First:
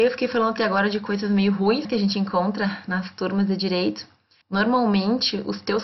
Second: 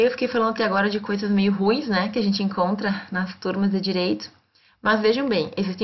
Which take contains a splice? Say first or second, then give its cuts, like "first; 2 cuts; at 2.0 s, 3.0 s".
first; 2 cuts; at 1.8 s, 4.4 s